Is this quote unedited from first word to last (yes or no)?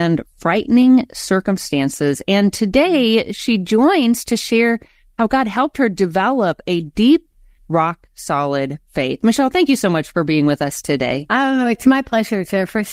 no